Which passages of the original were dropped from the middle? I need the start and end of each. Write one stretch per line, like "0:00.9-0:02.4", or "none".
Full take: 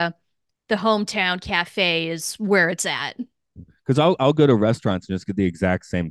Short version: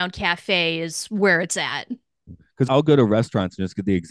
0:04.0-0:04.2